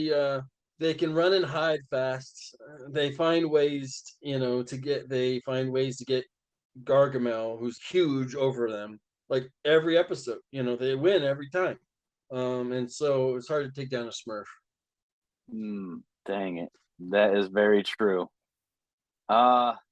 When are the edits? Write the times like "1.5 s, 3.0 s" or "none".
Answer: 7.8 s